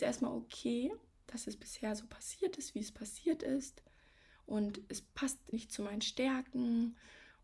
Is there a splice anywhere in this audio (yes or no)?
yes